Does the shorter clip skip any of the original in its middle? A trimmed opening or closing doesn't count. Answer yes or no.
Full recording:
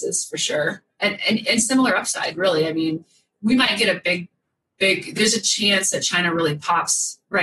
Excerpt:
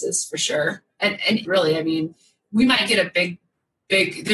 yes